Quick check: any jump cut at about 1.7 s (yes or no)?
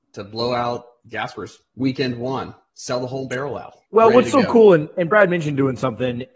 no